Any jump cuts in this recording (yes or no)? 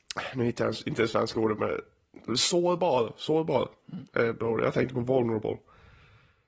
no